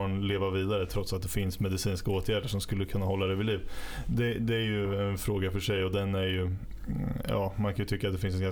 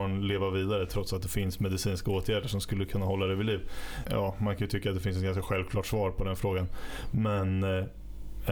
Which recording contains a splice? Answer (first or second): second